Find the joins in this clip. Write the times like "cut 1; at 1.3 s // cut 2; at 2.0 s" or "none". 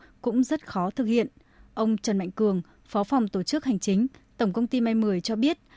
none